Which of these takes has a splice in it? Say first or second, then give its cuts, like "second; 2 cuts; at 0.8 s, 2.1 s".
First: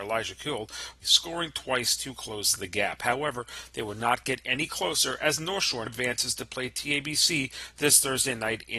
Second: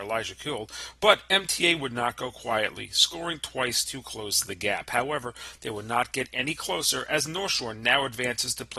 first; 2 cuts; at 1.0 s, 5.9 s